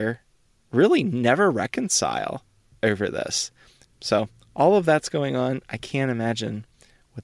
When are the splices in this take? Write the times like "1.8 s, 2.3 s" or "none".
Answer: 3.9 s